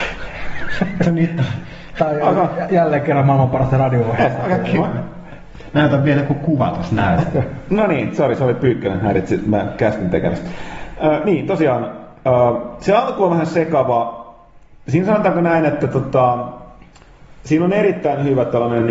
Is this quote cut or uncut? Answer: uncut